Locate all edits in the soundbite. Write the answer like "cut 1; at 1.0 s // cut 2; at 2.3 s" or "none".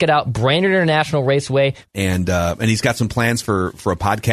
cut 1; at 1.9 s

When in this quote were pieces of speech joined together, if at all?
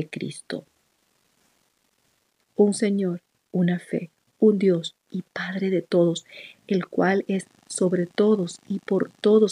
cut 1; at 2.4 s // cut 2; at 4.3 s

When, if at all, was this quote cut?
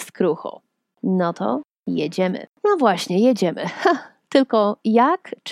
cut 1; at 0.9 s // cut 2; at 2.5 s

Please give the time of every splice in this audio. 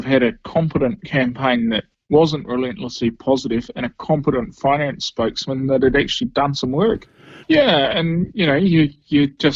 cut 1; at 7.4 s

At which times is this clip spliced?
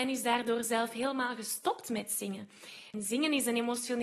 cut 1; at 2.9 s

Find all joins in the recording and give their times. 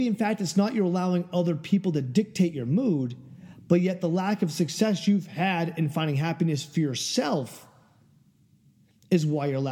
none

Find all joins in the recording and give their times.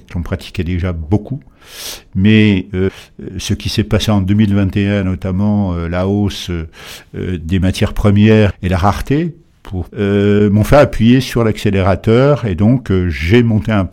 cut 1; at 8.5 s // cut 2; at 9.9 s

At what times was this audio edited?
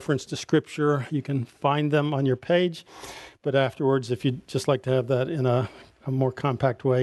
none

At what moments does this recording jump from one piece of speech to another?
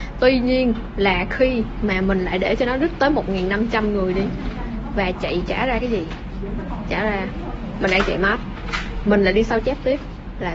none

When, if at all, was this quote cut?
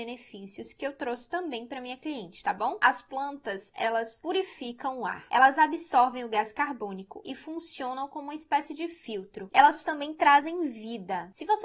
cut 1; at 9.5 s

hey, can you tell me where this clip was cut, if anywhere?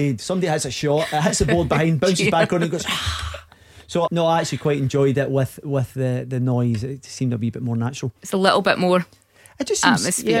cut 1; at 4.1 s

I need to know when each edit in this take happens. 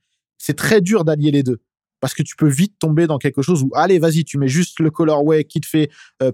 none

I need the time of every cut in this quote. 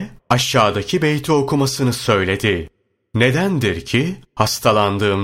none

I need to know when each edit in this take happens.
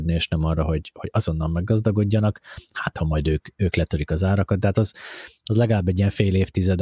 none

